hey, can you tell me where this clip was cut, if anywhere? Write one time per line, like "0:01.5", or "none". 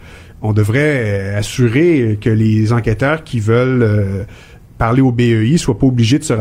none